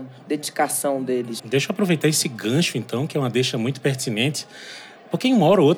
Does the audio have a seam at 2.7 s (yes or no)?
no